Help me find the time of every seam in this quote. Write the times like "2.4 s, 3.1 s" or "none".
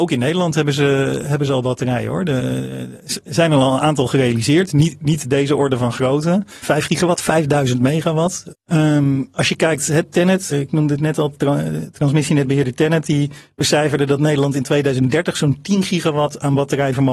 6.6 s, 8.5 s, 10.5 s